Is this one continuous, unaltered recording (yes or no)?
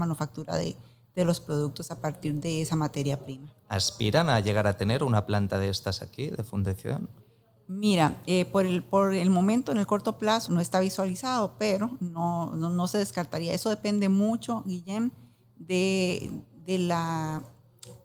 no